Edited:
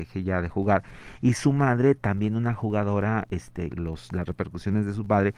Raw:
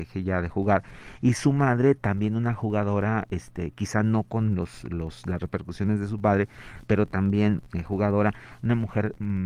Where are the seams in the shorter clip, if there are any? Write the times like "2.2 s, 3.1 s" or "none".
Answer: 3.7 s